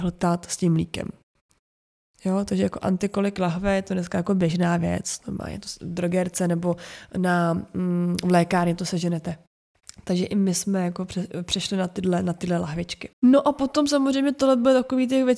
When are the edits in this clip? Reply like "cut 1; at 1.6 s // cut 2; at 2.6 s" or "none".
cut 1; at 13.1 s